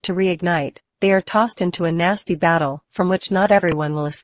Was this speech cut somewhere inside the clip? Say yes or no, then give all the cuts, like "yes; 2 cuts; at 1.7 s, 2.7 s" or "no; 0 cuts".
no; 0 cuts